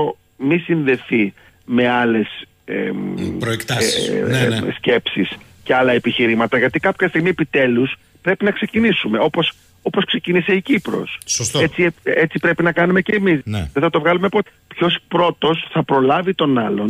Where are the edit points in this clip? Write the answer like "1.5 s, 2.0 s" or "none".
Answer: 13.4 s, 14.5 s